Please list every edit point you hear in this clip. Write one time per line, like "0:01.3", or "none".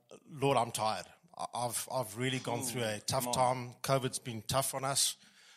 none